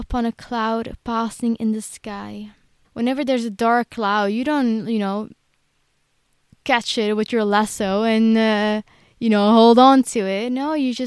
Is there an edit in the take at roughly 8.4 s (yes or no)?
no